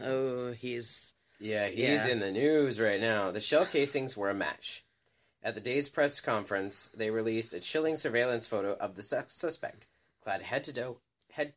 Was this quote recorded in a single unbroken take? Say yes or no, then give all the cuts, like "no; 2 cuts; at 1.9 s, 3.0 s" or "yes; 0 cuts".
yes; 0 cuts